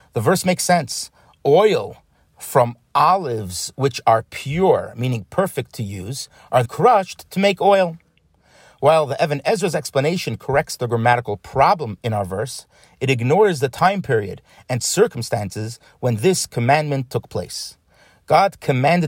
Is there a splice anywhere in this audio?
yes; 1 cut; at 6.7 s

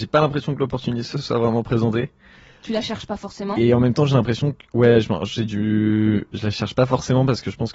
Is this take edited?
no; 0 cuts

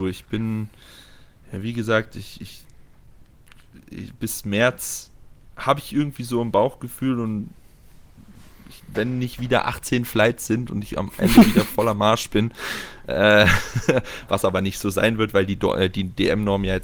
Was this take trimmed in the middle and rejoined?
no; 0 cuts

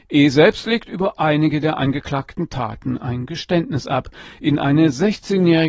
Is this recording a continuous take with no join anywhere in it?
yes; 0 cuts

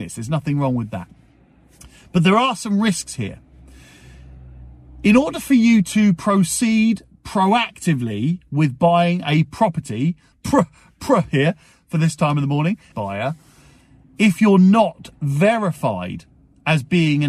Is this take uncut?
no; 2 cuts; at 10.3 s, 12.9 s

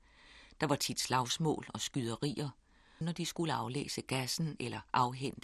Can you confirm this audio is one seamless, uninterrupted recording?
no; 1 cut; at 3.0 s

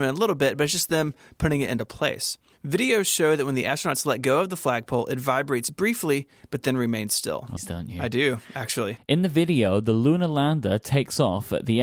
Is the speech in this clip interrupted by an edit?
yes; 2 cuts; at 7.6 s, 9.0 s

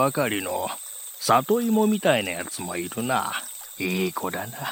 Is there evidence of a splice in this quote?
yes; 1 cut; at 3.8 s

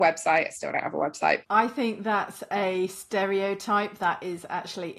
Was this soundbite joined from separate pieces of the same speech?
yes; 1 cut; at 1.4 s

